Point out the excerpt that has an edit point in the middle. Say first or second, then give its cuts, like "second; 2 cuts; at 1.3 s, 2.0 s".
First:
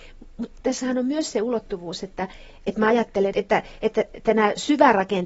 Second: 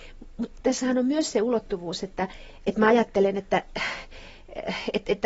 first; 1 cut; at 3.3 s